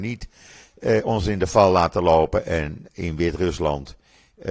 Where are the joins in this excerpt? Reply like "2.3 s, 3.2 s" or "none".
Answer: none